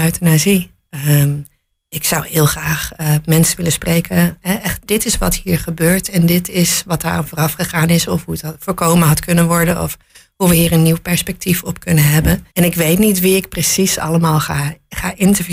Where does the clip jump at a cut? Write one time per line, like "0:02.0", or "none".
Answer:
0:04.9
0:12.5